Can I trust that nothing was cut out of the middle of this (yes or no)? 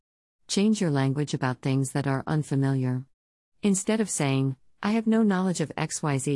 yes